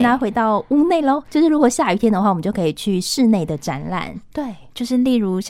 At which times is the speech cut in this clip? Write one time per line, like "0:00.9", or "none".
0:04.3